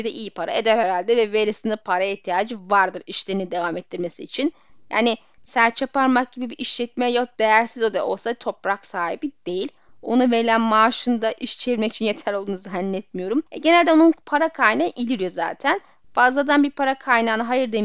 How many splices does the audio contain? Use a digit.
1